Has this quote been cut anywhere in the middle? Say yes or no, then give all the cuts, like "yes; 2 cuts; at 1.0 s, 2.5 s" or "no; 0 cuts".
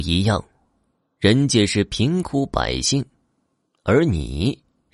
no; 0 cuts